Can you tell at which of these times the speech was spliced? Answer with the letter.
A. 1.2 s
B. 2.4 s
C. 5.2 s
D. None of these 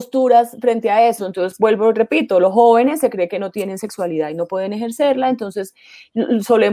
A